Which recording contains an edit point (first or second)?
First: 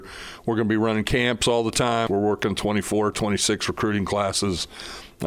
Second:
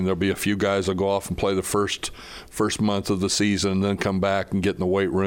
first